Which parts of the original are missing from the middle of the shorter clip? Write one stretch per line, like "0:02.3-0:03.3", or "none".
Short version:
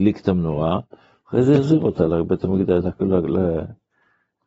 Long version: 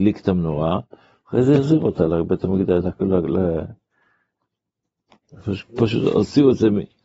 none